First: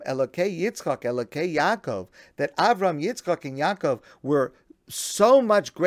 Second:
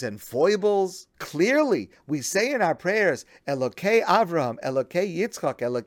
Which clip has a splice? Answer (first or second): second